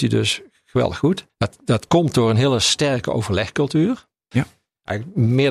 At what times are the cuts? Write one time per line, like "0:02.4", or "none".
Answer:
0:01.3
0:04.3

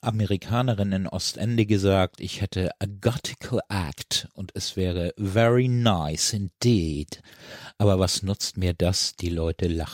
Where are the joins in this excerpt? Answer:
none

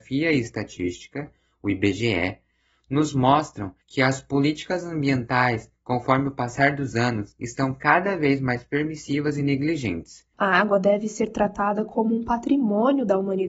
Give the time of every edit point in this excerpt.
0:03.8
0:10.3

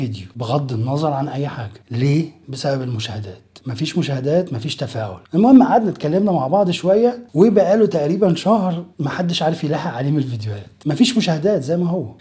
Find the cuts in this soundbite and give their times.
0:02.4
0:08.9

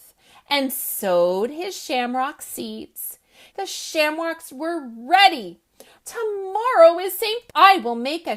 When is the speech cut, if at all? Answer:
0:03.5
0:06.0
0:07.5

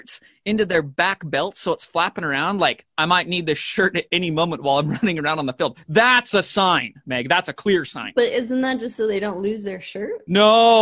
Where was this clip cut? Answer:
none

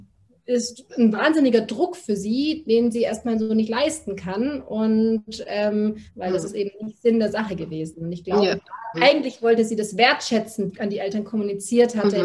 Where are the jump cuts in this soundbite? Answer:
0:06.1
0:08.9
0:10.7

